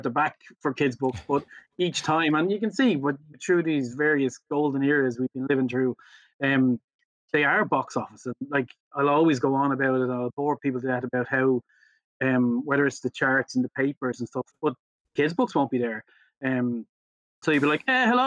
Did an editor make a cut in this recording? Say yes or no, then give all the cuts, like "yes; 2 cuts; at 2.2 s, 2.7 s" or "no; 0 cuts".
yes; 1 cut; at 14.5 s